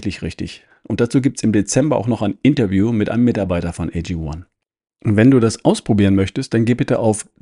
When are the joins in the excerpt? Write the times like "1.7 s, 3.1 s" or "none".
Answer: none